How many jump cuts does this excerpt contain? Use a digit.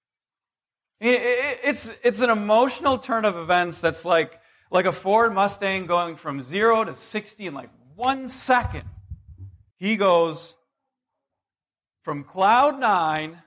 1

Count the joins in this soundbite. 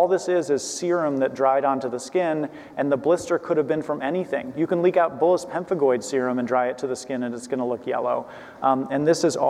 0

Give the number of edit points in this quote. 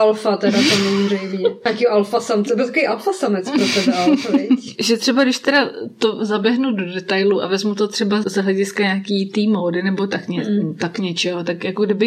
1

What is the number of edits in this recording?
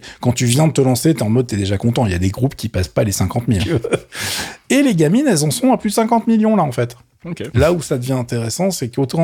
2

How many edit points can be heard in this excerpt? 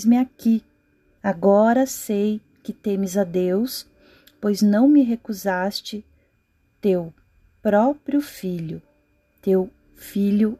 1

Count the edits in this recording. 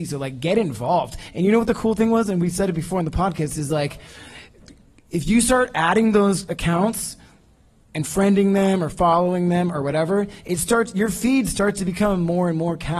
0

